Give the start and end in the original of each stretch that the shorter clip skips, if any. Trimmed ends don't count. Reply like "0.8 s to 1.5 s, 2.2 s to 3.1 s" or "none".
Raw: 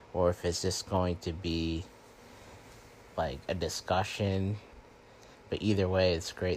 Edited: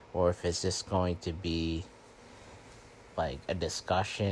none